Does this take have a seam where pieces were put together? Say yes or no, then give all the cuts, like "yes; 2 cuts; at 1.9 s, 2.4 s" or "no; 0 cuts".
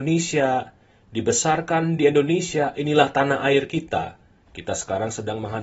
yes; 1 cut; at 4.4 s